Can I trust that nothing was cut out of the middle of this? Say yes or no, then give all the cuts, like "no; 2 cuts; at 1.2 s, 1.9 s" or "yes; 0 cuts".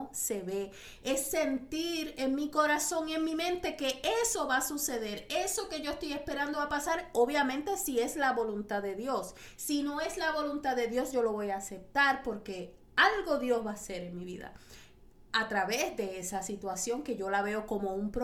yes; 0 cuts